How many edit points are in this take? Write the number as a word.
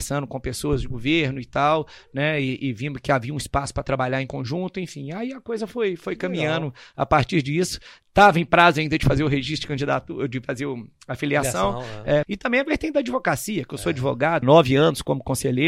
two